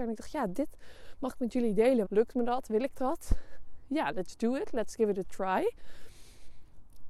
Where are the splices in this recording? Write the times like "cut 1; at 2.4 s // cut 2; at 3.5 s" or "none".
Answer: cut 1; at 2.0 s